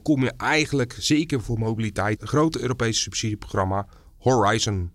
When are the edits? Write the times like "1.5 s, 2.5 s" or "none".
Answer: 2.2 s